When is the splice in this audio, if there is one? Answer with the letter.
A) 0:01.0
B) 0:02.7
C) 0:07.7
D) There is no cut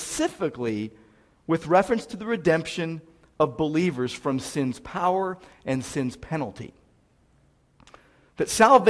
D